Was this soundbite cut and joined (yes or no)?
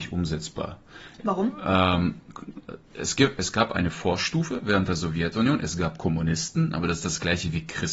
no